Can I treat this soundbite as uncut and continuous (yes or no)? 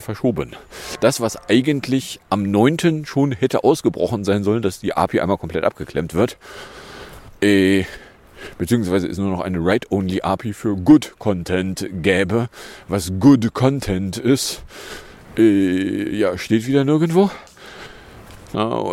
yes